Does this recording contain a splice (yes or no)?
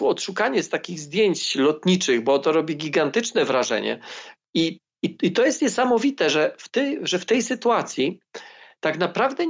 yes